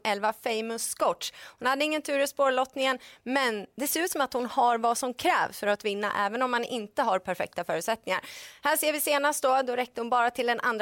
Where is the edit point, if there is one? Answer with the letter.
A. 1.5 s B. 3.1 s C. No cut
C